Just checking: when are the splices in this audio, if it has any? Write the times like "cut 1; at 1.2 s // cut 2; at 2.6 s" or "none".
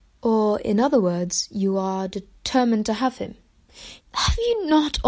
cut 1; at 4.0 s